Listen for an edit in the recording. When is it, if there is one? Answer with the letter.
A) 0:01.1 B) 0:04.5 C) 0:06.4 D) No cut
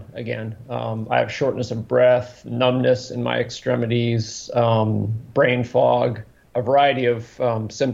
C